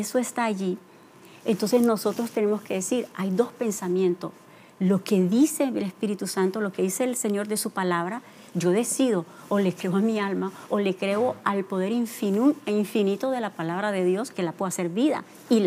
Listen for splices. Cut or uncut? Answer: cut